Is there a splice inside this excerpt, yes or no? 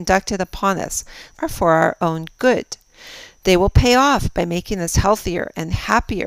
yes